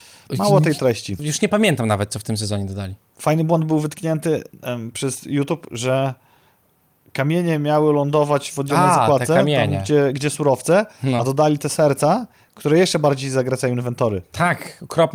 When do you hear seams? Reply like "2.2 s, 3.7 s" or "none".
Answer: 1.2 s